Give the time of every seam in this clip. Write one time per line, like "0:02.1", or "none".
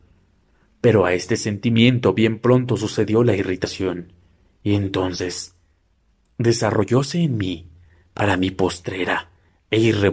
none